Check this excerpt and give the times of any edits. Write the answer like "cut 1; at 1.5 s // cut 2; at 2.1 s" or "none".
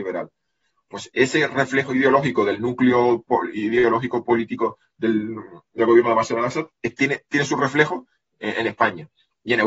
none